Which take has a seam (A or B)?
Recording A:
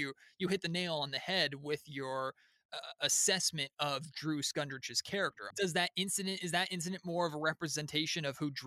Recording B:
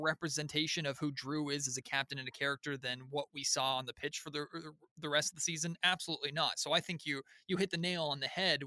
A